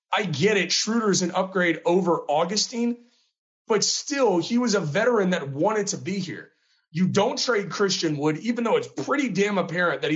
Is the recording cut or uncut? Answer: uncut